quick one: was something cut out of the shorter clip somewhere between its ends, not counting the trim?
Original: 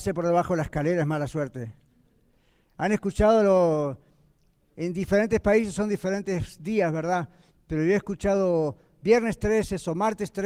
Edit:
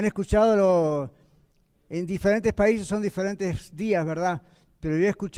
no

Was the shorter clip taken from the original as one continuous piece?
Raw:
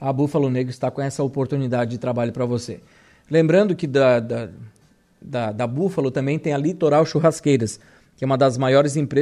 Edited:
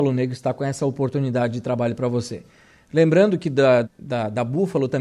no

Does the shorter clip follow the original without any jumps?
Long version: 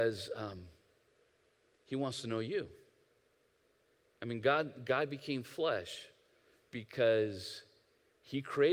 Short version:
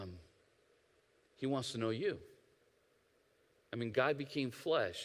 no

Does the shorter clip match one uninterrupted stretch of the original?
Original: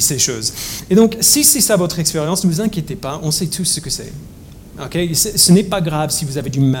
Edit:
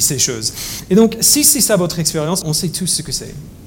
no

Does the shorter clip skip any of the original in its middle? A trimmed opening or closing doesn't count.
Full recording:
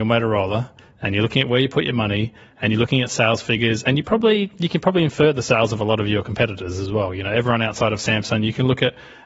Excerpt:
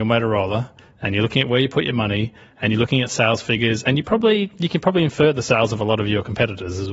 no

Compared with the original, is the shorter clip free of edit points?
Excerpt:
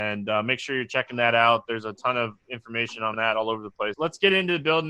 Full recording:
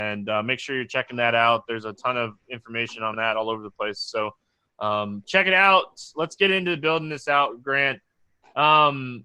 no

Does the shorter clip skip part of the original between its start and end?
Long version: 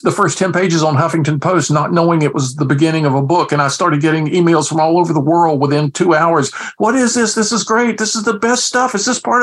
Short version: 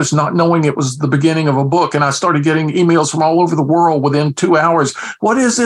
no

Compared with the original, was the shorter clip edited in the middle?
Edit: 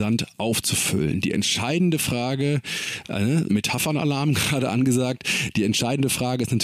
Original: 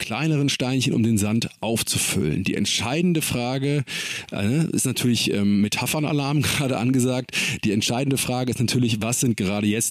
yes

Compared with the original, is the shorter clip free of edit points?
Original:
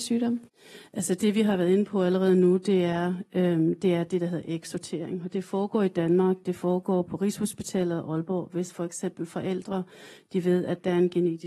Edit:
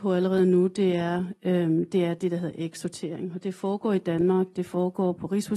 yes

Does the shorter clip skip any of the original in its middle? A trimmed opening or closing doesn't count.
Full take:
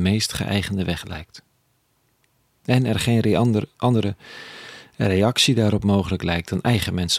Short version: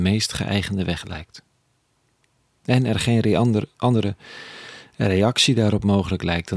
no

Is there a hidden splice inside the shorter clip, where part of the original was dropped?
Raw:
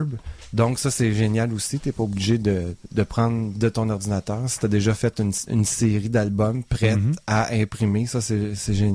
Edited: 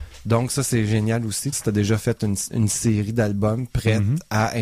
yes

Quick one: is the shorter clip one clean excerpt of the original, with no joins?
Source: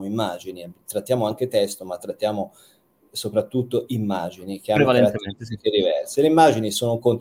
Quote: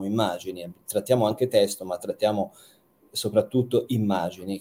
yes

